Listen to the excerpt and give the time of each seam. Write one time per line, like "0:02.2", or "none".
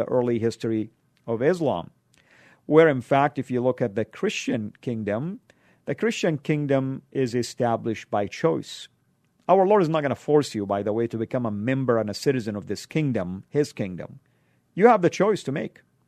none